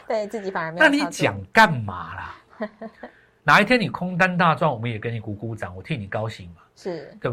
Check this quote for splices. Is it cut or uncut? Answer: cut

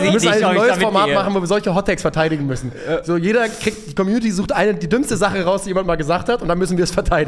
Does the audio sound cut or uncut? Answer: uncut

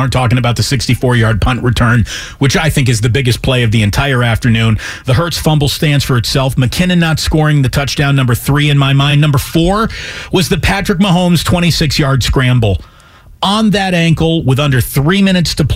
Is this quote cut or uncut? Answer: uncut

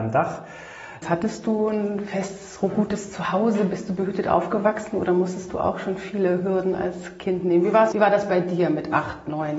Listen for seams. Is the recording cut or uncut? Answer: cut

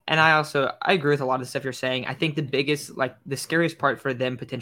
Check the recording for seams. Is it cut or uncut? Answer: uncut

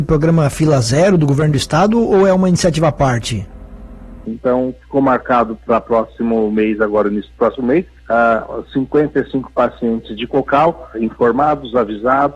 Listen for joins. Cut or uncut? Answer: cut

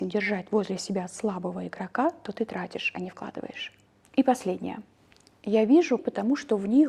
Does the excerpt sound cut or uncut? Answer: cut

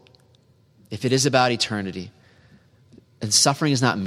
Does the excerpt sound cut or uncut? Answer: uncut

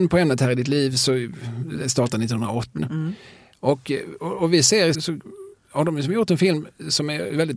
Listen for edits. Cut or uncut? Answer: cut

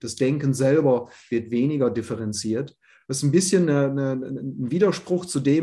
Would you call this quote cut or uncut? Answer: uncut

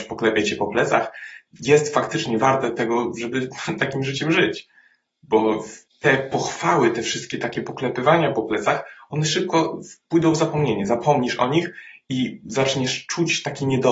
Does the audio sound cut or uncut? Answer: uncut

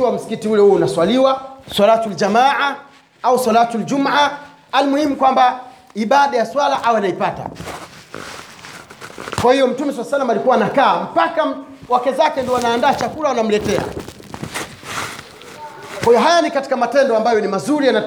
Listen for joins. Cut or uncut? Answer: cut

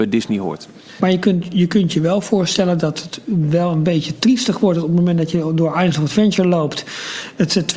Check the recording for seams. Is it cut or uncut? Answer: cut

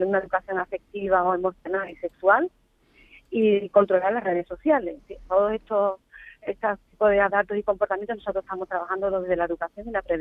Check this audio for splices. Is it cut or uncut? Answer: uncut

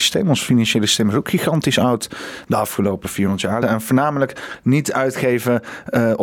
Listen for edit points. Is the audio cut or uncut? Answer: cut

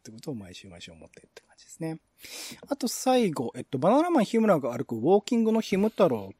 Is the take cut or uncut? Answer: uncut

